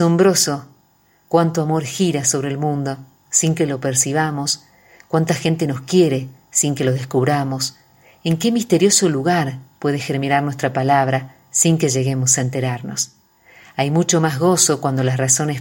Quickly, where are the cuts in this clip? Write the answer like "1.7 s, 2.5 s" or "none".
none